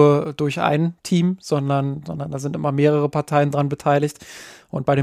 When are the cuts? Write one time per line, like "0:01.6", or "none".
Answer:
none